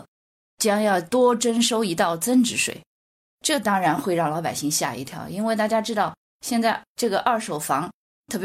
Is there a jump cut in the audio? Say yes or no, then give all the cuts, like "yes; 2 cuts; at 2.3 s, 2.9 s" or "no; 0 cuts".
no; 0 cuts